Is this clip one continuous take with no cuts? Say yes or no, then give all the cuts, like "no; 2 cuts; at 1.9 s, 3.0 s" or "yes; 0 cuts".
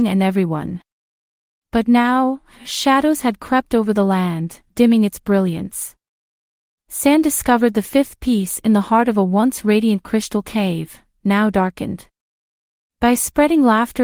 yes; 0 cuts